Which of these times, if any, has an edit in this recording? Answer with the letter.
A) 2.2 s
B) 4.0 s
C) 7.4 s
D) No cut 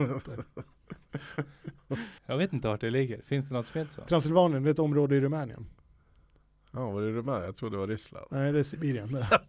A